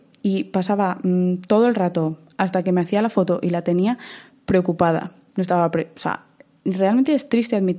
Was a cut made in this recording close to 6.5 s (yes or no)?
no